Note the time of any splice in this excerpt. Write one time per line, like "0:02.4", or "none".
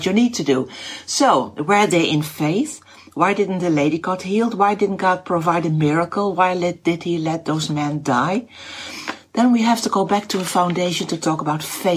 none